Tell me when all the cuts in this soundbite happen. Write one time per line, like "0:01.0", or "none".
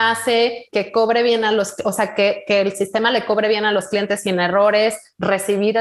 none